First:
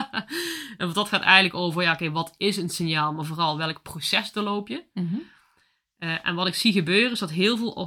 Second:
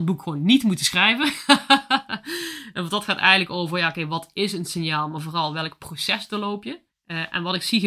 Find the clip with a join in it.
second; 1 cut; at 6.9 s

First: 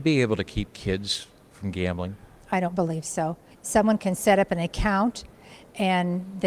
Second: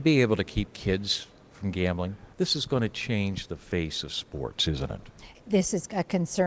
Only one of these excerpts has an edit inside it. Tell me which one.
second; 2 cuts; at 2.3 s, 5.3 s

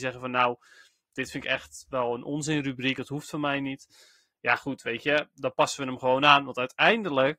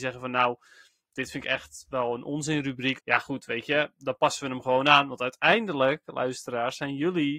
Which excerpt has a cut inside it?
second; 1 cut; at 3.0 s

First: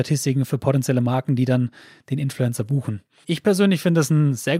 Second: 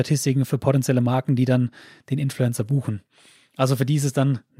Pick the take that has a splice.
first; 1 cut; at 3.2 s

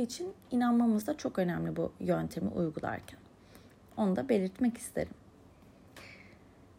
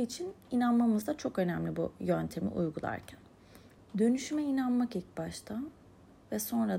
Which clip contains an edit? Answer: second; 1 cut; at 3.8 s

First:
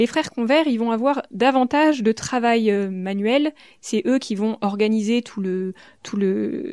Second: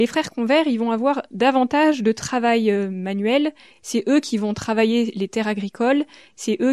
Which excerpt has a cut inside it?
first; 1 cut; at 3.8 s

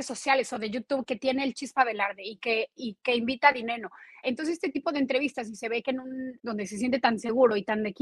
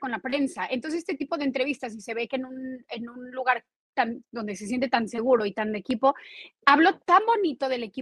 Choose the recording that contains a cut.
first; 2 cuts; at 4.2 s, 6.4 s

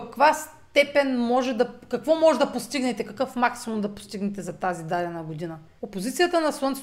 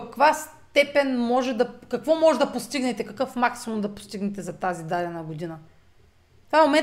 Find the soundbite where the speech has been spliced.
first; 1 cut; at 5.8 s

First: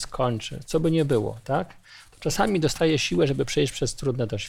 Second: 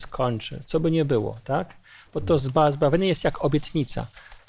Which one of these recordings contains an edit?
second; 1 cut; at 2.1 s

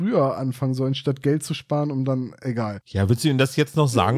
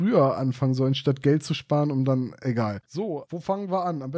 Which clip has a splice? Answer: second; 1 cut; at 2.8 s

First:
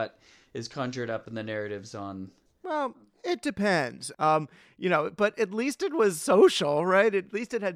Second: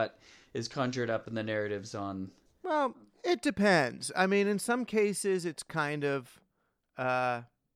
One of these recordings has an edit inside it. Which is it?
first; 1 cut; at 4.1 s

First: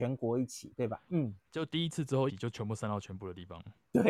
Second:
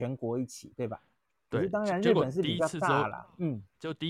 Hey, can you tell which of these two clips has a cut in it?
first; 2 cuts; at 1.1 s, 2.3 s

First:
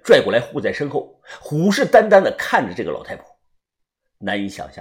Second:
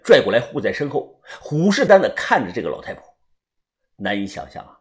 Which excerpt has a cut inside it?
second; 1 cut; at 1.9 s

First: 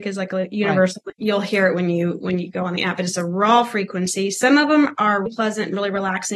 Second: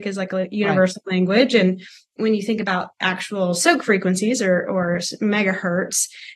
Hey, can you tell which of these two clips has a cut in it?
first; 2 cuts; at 1.1 s, 5.3 s

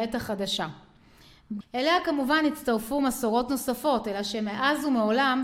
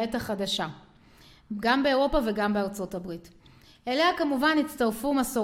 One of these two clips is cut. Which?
first; 1 cut; at 1.6 s

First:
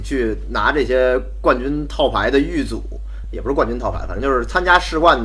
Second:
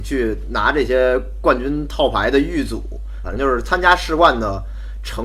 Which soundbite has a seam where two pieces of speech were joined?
second; 1 cut; at 3.2 s

